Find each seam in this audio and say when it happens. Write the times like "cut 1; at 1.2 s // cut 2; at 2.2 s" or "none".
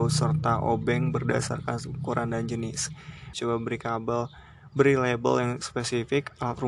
cut 1; at 3.3 s